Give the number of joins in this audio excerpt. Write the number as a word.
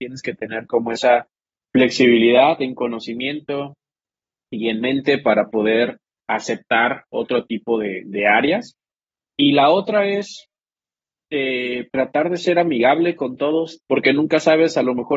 two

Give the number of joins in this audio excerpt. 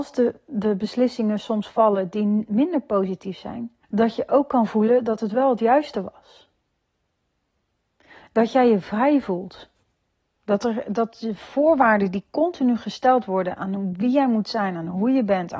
one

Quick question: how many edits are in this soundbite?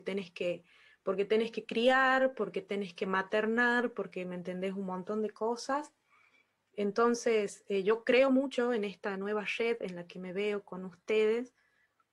zero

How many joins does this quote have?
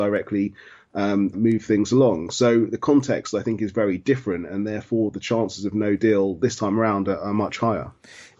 one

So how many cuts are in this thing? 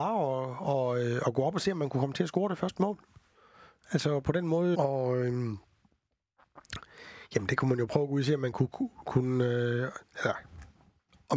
one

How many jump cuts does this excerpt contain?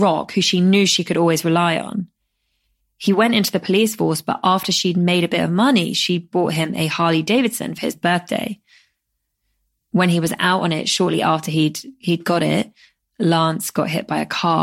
zero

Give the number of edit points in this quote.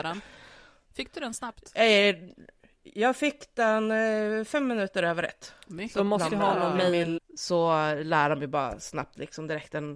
one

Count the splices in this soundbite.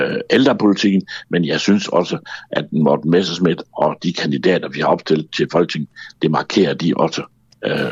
two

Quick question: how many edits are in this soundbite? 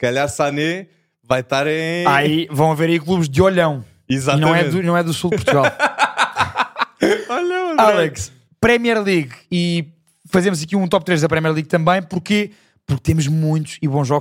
zero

